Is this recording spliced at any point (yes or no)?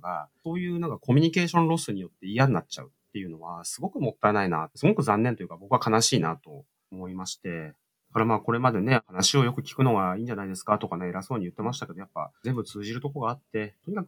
no